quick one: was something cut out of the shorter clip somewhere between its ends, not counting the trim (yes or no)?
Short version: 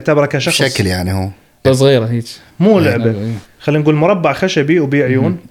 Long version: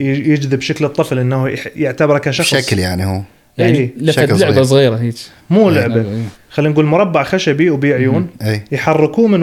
yes